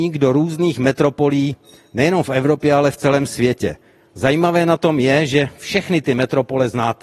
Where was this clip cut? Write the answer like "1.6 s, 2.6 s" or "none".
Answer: none